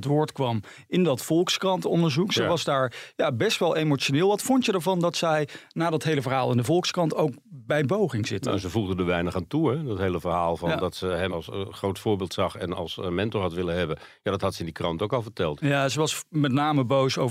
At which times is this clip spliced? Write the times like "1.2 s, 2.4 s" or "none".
11.3 s, 15.6 s

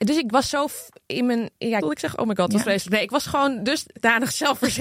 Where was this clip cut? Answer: 1.8 s

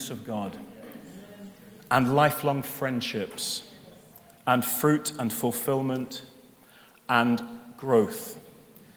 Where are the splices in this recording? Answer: none

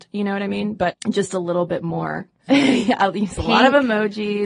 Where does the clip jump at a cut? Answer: 0.9 s, 2.5 s

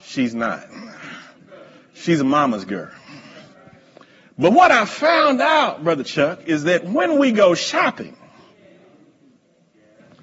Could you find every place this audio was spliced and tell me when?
none

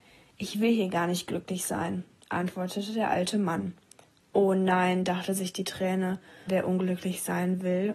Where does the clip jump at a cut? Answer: 6.5 s

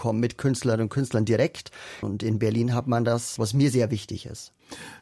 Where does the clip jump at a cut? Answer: 2.0 s, 3.4 s

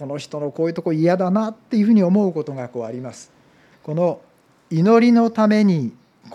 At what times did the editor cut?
3.7 s

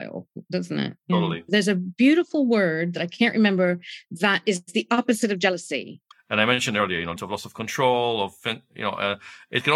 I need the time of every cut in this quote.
1.5 s, 6.1 s, 7.2 s

